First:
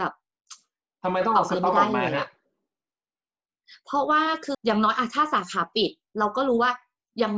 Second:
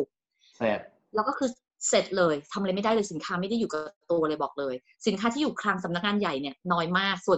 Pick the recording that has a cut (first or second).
first